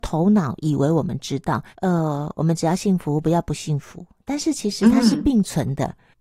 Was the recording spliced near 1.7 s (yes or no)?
yes